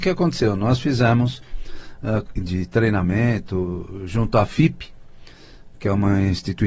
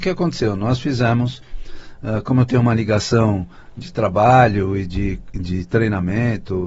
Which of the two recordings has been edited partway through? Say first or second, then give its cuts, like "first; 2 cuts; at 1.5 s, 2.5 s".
first; 1 cut; at 2.3 s